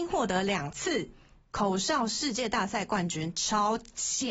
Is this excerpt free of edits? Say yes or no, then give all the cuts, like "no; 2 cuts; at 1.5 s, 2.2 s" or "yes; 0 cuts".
yes; 0 cuts